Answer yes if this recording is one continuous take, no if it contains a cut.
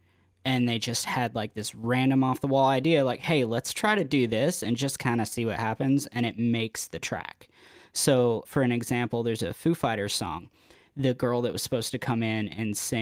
no